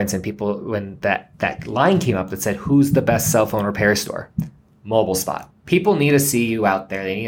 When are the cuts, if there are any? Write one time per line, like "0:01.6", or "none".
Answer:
0:05.5